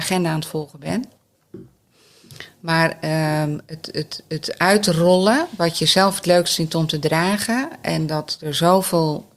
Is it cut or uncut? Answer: uncut